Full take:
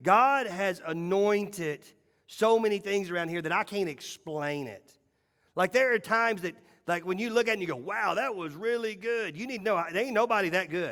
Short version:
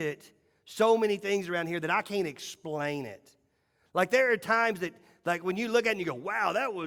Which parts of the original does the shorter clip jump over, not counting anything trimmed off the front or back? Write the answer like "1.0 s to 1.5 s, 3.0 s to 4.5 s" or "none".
none